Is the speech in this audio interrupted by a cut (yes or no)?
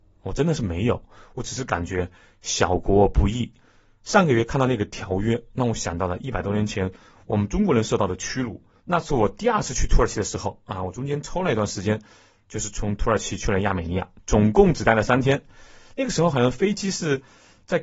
yes